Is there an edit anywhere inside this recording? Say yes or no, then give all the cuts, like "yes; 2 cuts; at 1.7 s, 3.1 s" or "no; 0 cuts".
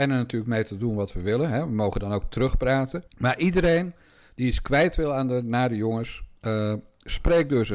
yes; 1 cut; at 3.1 s